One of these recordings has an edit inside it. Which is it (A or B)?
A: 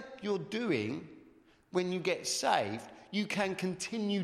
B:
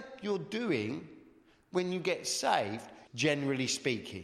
B